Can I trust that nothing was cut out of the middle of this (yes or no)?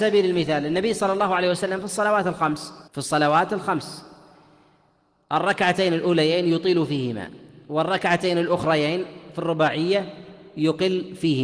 no